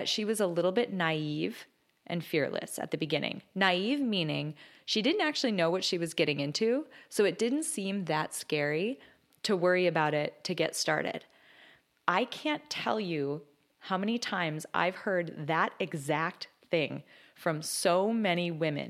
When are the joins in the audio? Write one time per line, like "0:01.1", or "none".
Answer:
none

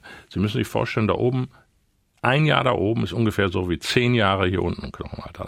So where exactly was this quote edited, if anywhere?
none

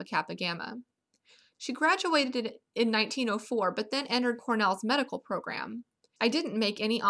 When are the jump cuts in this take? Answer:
0:06.2

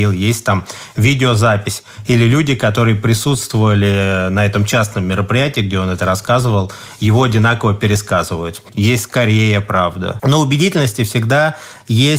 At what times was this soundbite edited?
0:10.2

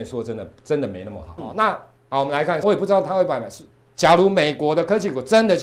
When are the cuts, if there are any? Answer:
0:01.4
0:02.6

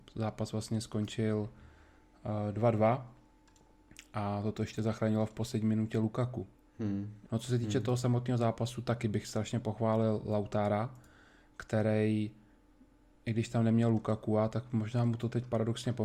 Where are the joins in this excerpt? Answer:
0:07.3

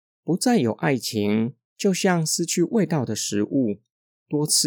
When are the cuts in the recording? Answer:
0:01.7

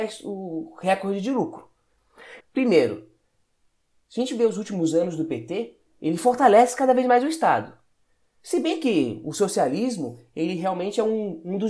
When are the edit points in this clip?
0:02.4

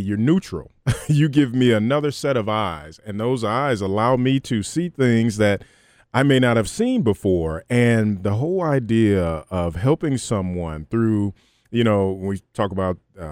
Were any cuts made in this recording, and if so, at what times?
none

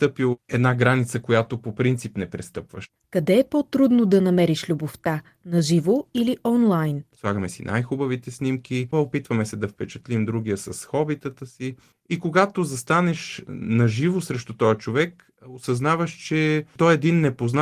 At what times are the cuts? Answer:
0:07.1
0:08.9

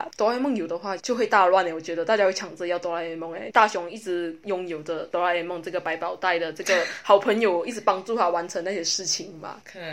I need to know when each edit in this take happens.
0:01.0
0:03.5

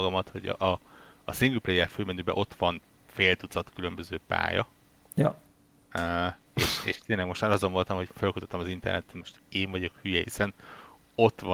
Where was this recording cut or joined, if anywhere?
0:06.5
0:10.2

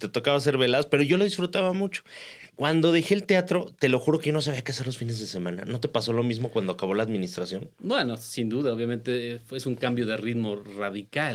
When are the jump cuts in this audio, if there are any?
none

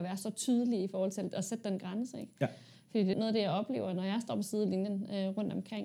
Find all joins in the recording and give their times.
0:03.1

